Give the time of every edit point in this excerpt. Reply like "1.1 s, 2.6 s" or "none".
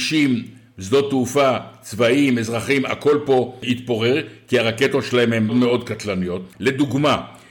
5.5 s, 6.5 s

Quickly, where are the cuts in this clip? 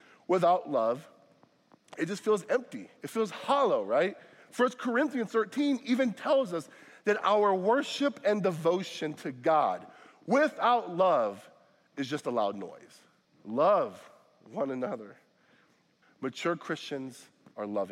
13.2 s, 16.0 s

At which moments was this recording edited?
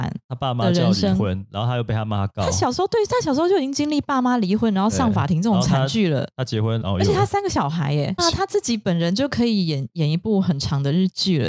6.8 s, 8.2 s

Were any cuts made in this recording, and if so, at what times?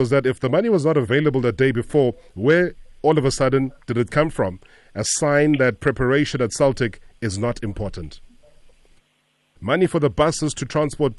9.6 s

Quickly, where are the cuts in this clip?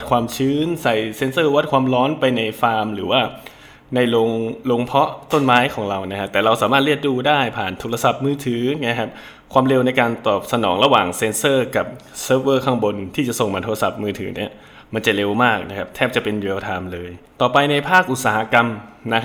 none

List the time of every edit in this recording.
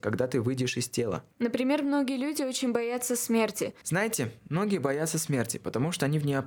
1.3 s, 3.8 s

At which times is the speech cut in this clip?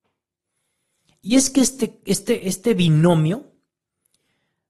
2.4 s

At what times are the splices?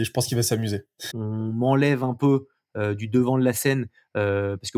1.1 s

